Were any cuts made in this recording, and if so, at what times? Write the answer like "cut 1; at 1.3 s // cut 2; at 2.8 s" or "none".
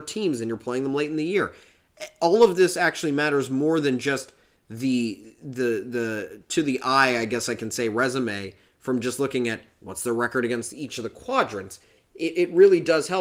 none